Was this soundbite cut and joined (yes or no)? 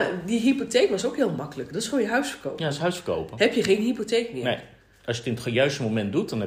no